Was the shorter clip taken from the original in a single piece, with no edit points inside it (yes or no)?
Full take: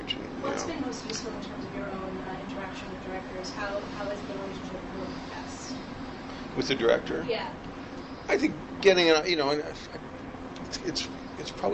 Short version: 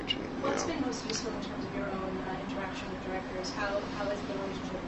yes